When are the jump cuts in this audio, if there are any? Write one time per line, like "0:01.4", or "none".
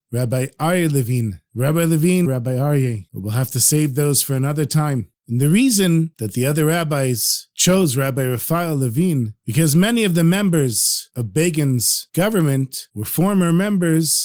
0:02.3